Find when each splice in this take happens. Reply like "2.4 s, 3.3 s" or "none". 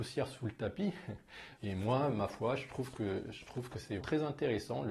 1.6 s, 4.0 s